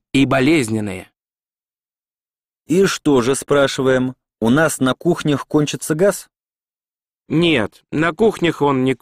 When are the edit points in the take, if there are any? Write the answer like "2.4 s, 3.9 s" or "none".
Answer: none